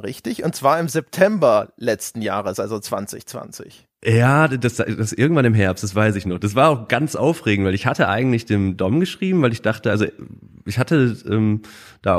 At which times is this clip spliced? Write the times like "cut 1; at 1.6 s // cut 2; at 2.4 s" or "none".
none

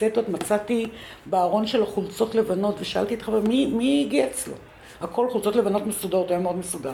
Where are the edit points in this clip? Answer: none

